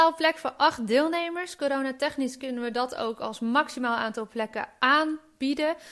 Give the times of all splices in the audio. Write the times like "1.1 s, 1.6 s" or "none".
none